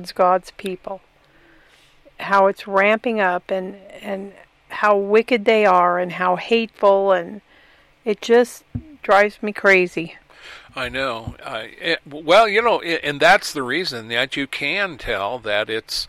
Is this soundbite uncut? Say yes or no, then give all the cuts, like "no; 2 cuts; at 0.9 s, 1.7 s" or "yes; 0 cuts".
yes; 0 cuts